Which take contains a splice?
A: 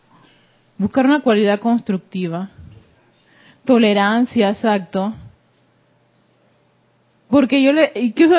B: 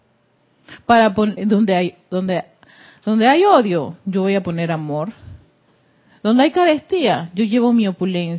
B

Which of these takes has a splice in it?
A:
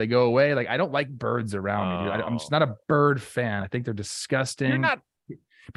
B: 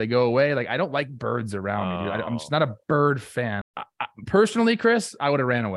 B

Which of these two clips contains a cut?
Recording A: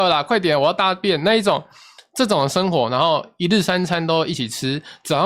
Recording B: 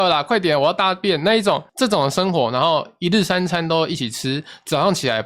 B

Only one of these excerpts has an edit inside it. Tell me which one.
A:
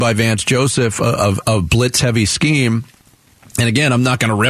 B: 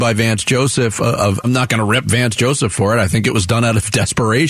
B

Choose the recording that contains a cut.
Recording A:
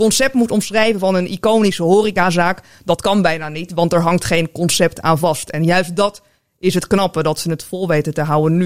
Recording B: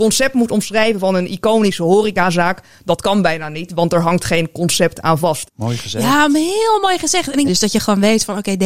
B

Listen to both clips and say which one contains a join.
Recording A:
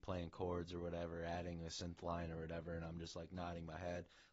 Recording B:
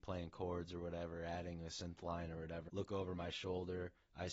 B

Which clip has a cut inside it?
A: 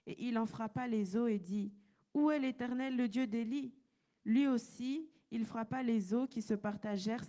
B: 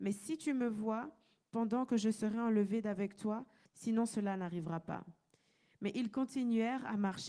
B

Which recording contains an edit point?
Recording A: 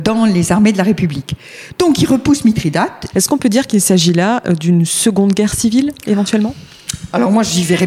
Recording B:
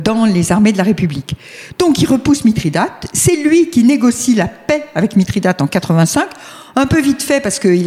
A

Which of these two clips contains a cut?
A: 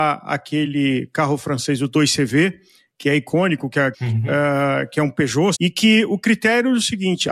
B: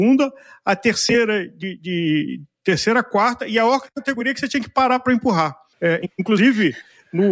A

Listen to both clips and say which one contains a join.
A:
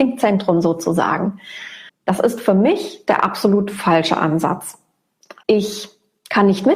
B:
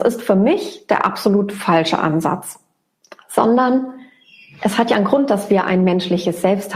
A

